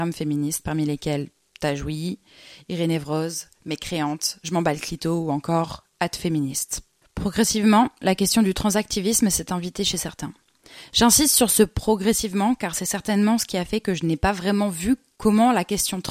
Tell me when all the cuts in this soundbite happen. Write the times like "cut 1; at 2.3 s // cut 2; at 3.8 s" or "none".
none